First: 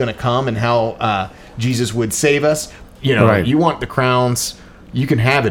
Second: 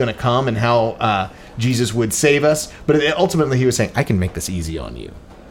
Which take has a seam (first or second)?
first